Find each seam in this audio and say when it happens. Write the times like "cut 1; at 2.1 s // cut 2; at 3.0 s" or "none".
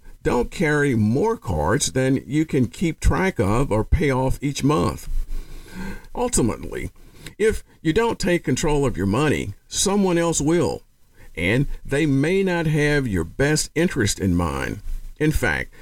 cut 1; at 6.1 s